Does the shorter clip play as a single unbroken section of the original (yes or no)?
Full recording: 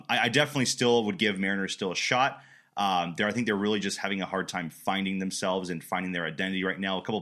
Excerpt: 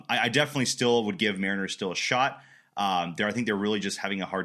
yes